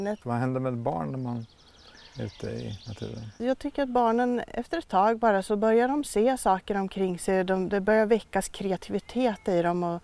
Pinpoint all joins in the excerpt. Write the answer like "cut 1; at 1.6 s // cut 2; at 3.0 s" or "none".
cut 1; at 3.4 s

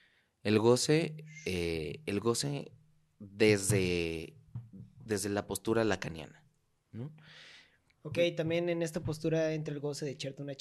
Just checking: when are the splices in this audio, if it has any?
none

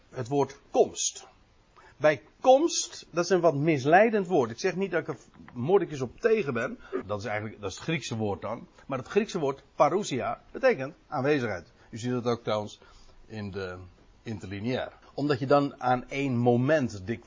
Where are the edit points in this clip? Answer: cut 1; at 7.0 s // cut 2; at 15.0 s

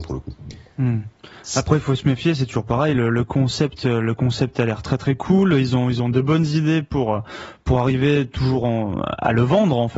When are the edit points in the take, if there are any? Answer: none

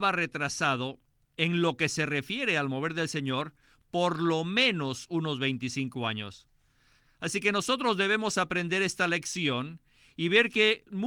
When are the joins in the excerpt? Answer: cut 1; at 7.0 s

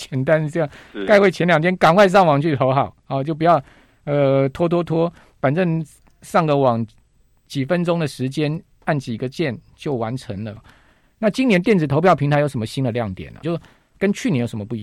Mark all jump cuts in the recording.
cut 1; at 10.6 s // cut 2; at 13.4 s

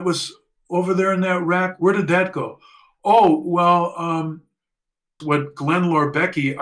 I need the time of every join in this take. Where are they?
cut 1; at 5.2 s

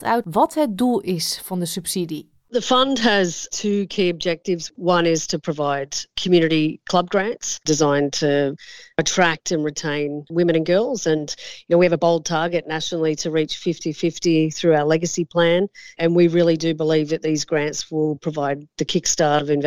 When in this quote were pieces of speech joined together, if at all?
none

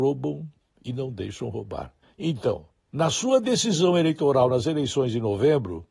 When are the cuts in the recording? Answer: cut 1; at 2.0 s

